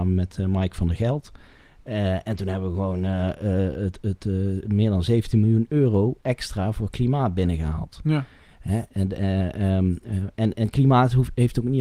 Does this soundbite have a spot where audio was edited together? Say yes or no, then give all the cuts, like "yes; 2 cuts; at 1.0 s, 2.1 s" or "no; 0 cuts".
no; 0 cuts